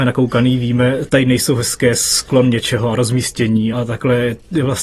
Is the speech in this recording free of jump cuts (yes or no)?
no